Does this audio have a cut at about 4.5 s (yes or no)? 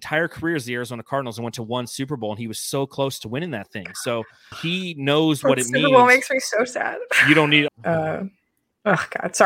yes